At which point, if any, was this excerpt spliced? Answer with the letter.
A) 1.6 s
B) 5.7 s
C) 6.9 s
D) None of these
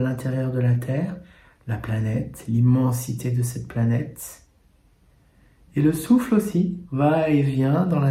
C